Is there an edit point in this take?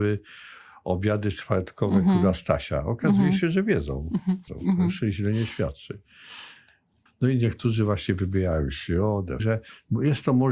yes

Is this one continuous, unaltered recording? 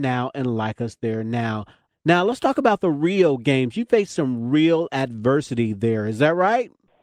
yes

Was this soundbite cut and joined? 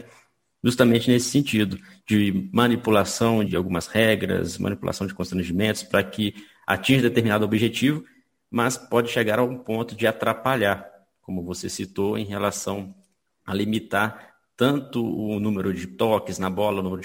yes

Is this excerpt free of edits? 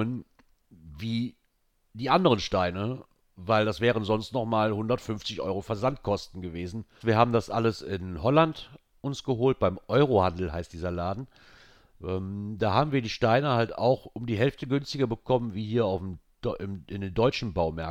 no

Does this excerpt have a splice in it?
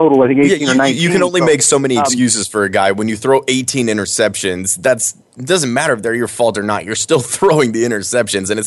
no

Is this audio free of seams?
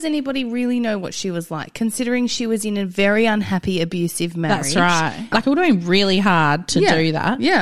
no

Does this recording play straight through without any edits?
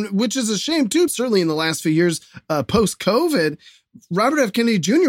no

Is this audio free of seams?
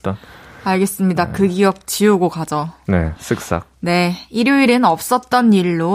yes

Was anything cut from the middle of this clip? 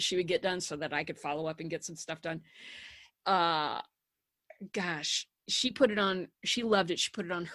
yes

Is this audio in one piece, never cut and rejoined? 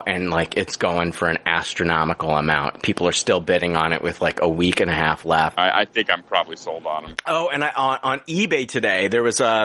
no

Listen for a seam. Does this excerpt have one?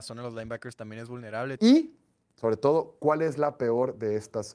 yes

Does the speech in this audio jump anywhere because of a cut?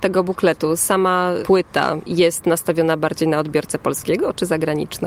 no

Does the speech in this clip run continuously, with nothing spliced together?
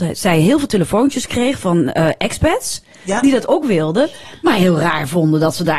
yes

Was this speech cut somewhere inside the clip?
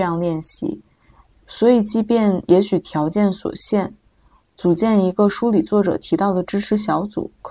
yes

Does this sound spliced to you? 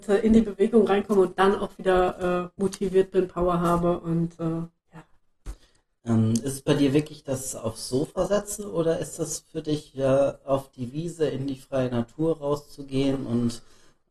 no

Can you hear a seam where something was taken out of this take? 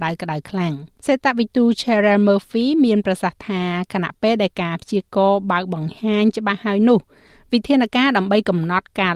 yes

